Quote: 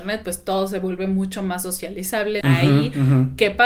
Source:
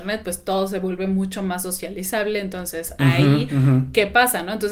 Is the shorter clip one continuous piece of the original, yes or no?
no